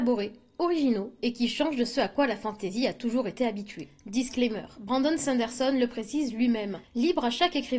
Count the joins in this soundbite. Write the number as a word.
one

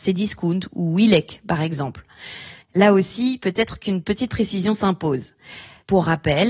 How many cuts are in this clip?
one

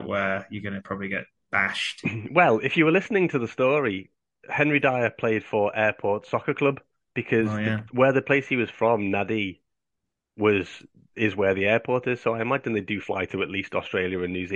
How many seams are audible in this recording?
zero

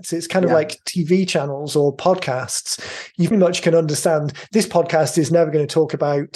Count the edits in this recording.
one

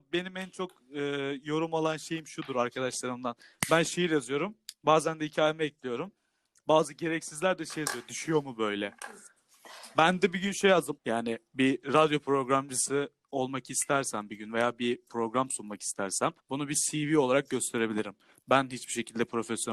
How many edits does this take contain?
two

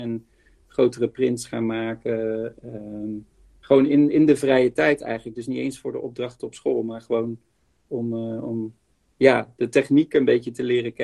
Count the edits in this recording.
zero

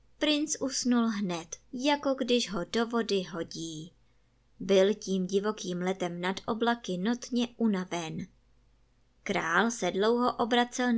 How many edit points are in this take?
one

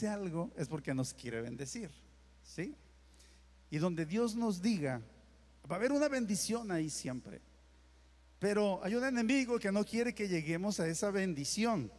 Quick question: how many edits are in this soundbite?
zero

